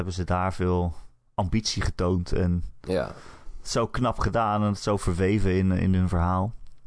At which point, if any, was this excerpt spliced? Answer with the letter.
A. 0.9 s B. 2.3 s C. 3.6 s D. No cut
D